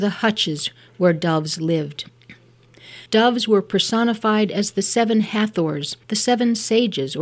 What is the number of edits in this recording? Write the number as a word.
two